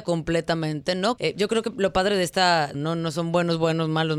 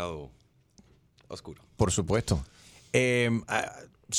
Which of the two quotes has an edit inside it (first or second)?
first